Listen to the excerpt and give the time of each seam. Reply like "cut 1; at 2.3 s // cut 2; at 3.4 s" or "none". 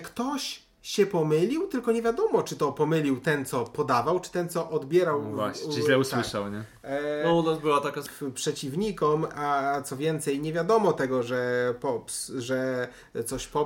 cut 1; at 8.1 s